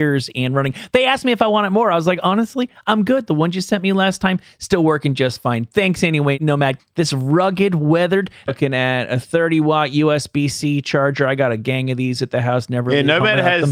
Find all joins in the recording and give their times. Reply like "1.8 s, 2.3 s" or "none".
6.8 s, 8.5 s